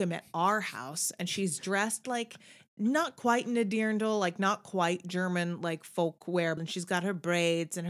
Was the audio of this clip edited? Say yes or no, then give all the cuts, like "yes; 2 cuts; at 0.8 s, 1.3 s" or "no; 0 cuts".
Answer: yes; 1 cut; at 6.6 s